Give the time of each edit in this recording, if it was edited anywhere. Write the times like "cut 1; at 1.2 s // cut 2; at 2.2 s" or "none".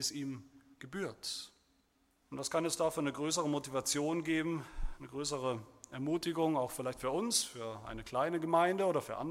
cut 1; at 2.2 s